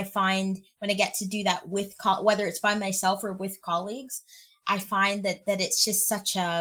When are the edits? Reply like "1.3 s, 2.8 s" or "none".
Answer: none